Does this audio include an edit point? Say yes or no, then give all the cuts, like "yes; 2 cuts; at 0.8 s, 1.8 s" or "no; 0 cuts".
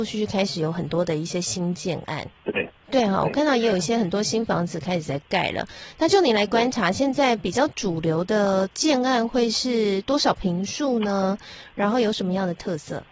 no; 0 cuts